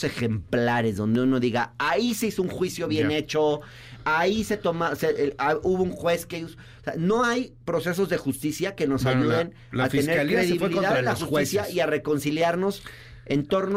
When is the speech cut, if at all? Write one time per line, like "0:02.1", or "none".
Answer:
none